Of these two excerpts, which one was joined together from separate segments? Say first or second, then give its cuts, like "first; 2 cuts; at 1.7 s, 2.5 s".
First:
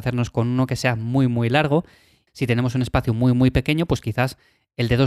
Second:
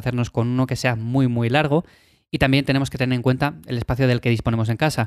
first; 1 cut; at 2.3 s